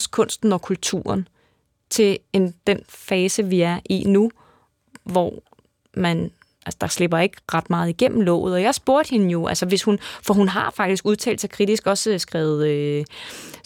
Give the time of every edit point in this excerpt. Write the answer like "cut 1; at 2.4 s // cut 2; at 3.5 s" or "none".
cut 1; at 7.4 s